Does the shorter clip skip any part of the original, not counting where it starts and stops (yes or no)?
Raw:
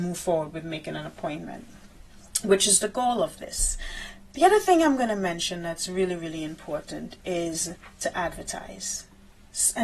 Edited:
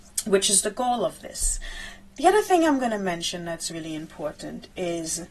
yes